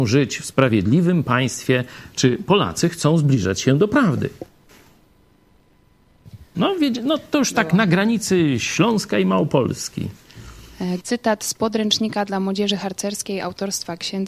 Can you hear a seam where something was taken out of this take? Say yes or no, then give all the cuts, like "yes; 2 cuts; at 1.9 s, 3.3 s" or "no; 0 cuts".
yes; 2 cuts; at 6.5 s, 11.0 s